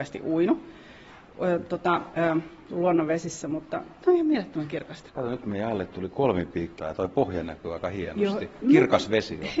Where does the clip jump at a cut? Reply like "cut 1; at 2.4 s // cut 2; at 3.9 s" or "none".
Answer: cut 1; at 2.1 s // cut 2; at 5.1 s // cut 3; at 6.8 s